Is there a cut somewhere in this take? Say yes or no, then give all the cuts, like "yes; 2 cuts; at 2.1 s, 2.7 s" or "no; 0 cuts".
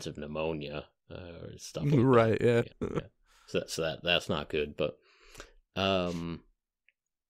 yes; 1 cut; at 2.7 s